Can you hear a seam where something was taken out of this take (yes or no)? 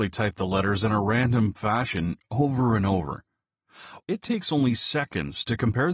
yes